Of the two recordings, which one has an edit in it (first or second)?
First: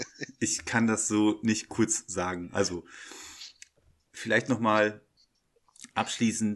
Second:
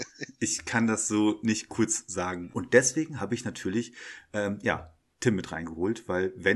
second